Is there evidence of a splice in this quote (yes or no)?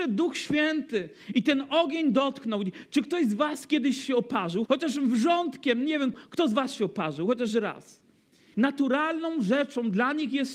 yes